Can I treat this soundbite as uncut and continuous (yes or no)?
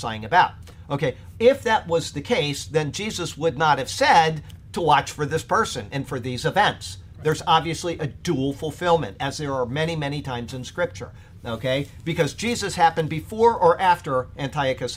yes